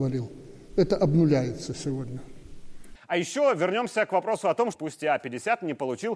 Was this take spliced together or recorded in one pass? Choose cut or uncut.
cut